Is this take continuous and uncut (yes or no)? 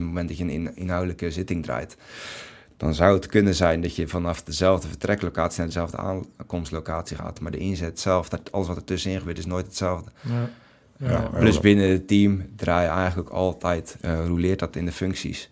yes